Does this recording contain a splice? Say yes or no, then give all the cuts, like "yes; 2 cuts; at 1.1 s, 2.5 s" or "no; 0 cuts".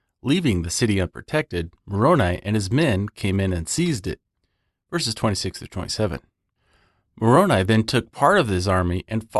no; 0 cuts